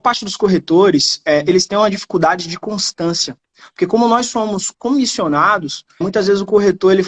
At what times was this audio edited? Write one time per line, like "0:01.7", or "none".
0:06.0